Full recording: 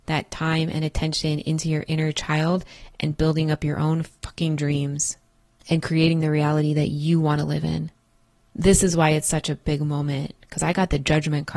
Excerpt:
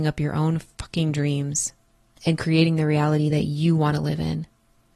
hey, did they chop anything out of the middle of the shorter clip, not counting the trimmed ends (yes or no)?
no